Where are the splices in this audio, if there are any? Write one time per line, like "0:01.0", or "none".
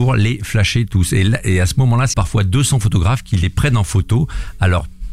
0:02.1